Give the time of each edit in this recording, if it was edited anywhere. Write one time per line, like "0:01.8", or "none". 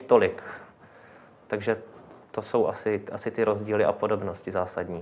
none